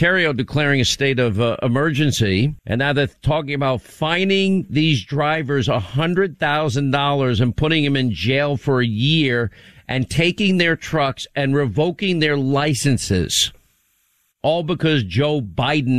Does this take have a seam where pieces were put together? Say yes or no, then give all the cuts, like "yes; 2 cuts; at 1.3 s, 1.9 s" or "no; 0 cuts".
yes; 1 cut; at 2.6 s